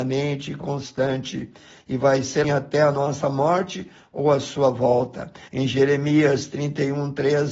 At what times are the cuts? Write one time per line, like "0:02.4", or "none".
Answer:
0:02.4
0:05.5